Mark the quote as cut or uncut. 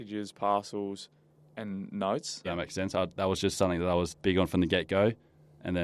cut